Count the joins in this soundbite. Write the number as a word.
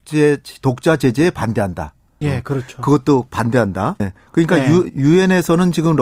two